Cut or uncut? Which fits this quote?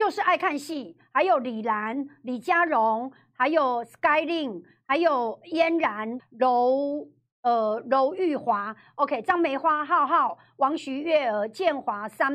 cut